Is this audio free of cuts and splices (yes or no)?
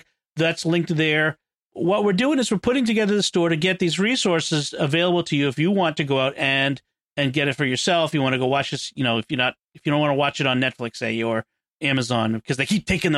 yes